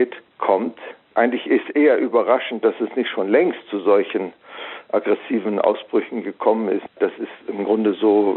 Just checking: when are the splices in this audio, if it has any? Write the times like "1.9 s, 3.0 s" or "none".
none